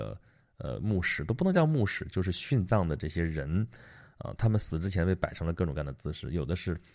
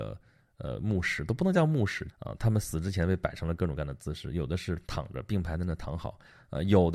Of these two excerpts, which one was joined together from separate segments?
second; 2 cuts; at 2.1 s, 4.8 s

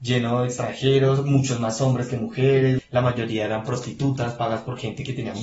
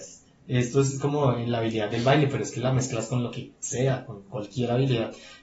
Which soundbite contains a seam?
first; 1 cut; at 2.8 s

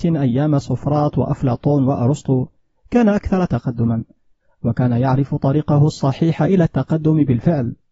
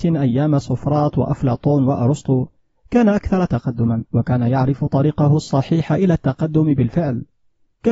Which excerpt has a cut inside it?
second; 1 cut; at 4.1 s

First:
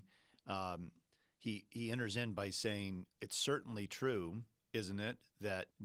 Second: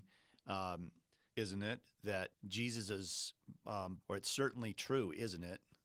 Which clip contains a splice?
second; 2 cuts; at 1.3 s, 4.0 s

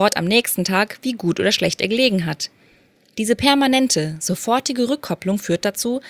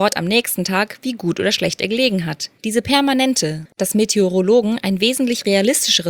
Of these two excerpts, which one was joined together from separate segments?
second; 2 cuts; at 2.6 s, 3.7 s

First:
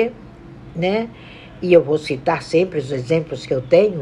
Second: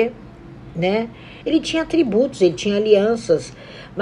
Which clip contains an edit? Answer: second; 1 cut; at 1.4 s

